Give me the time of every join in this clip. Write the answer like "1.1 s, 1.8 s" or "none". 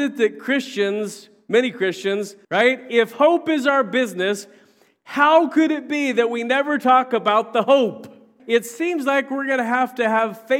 2.4 s, 8.4 s